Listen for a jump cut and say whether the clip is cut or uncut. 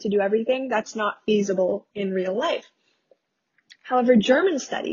uncut